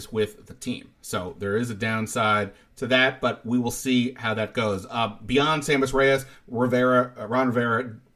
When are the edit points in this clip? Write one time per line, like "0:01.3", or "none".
none